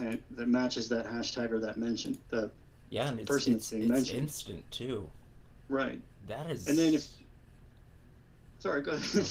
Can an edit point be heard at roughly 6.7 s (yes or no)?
no